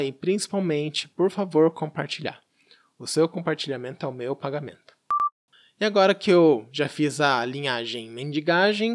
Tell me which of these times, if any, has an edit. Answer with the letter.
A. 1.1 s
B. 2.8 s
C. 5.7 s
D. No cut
D